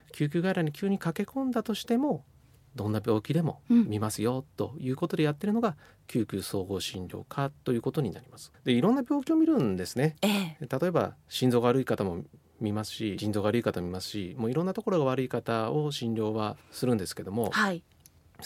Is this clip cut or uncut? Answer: cut